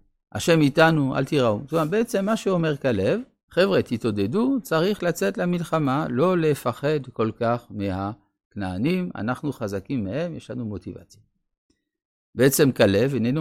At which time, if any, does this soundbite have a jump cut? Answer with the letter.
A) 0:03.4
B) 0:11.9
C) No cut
A